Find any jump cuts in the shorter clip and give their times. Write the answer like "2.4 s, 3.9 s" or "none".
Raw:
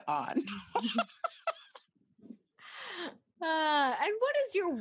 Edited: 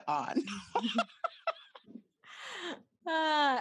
1.8 s

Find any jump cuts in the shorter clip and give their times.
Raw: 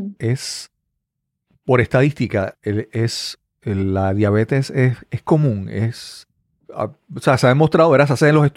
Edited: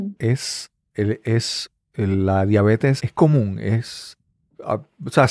0.9 s, 3.0 s

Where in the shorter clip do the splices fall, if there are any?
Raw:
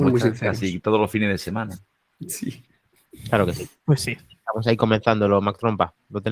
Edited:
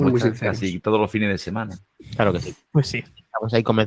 2.0 s

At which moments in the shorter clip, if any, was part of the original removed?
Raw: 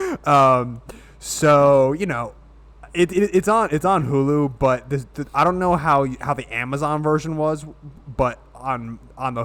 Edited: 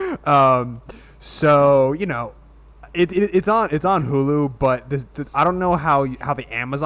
none

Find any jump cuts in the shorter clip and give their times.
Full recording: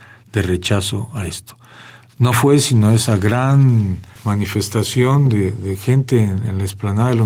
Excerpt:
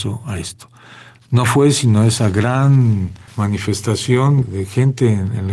4.4 s

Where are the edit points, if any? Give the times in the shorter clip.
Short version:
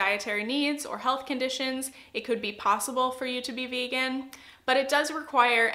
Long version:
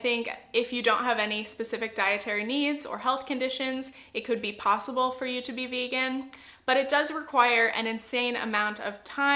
none

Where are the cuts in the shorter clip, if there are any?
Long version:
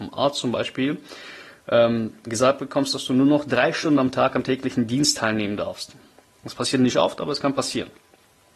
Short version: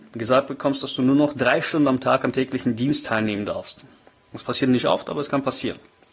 none

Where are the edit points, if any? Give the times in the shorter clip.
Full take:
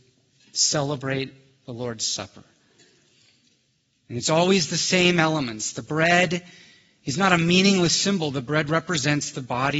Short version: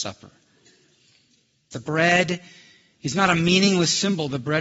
1.7 s

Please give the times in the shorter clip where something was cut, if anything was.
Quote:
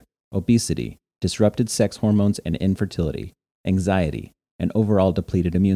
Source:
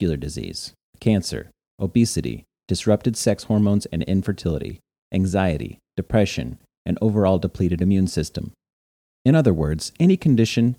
4.4 s

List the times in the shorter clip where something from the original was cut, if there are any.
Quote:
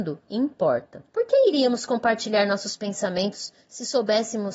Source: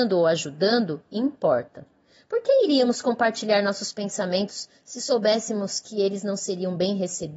1.1 s

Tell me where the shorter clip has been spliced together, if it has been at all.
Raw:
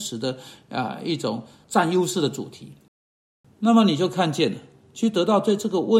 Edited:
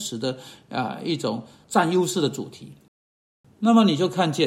none

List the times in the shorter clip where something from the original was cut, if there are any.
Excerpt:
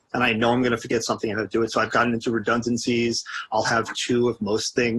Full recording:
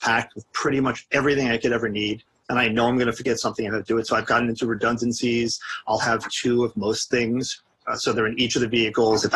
none

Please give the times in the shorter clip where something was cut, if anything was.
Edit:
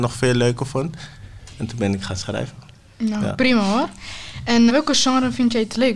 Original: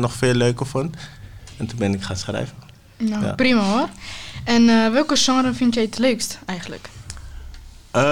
4.7 s

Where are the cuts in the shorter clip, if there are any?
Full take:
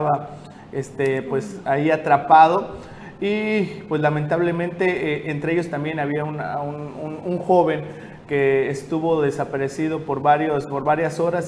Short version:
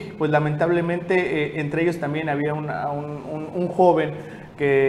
none

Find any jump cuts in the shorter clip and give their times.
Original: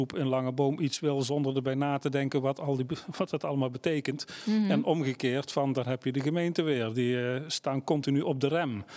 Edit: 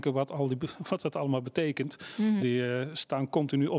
2.4 s

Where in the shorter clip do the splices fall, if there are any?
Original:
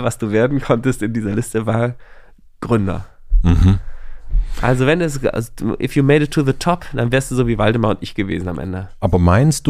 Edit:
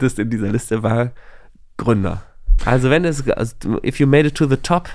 2.6 s

